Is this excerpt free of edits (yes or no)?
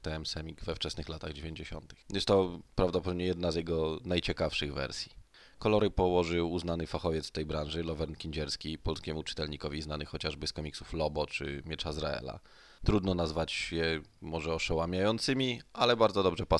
no